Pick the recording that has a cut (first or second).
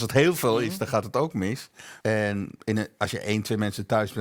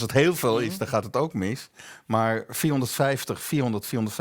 first